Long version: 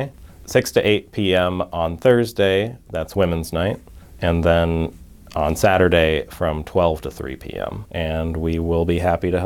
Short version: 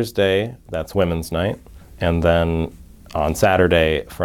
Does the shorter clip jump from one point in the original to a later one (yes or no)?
no